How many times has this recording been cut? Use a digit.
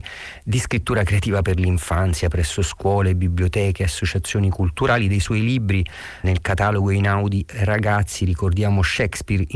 1